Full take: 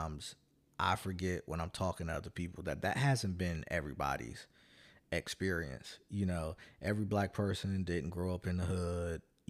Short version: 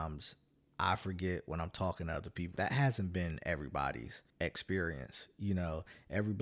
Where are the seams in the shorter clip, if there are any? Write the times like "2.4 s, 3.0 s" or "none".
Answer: 2.6 s, 4.3 s